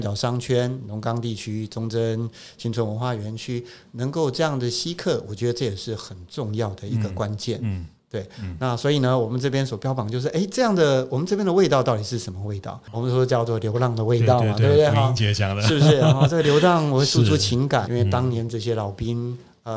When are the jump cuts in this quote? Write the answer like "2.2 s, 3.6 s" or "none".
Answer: 17.9 s